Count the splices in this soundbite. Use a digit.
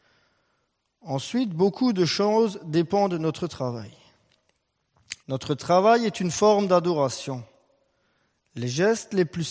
1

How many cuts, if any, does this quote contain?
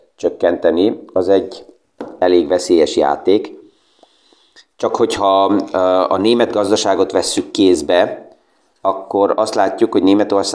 0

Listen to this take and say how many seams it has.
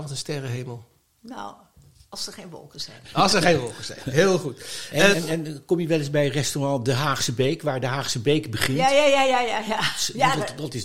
1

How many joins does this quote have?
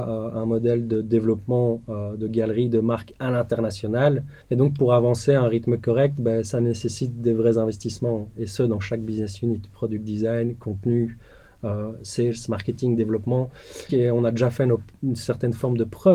2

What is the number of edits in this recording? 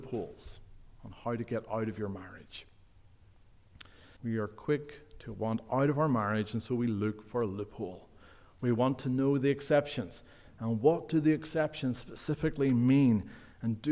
1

